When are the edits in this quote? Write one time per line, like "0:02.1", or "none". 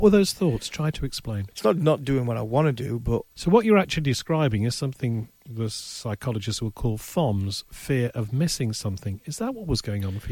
0:01.5
0:03.3